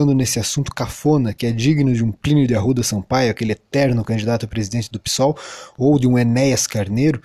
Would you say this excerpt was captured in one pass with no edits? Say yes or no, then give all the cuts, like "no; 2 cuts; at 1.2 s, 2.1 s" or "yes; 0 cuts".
yes; 0 cuts